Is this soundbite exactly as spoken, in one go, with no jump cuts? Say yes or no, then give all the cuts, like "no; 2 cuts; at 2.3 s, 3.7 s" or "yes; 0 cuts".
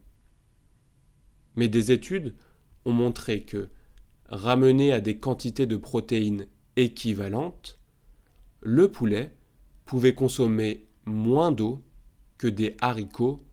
yes; 0 cuts